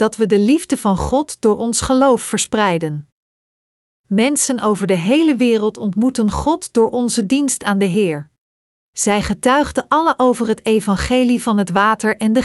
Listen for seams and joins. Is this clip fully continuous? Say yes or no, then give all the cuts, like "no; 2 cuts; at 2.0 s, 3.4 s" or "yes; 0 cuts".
no; 1 cut; at 8.8 s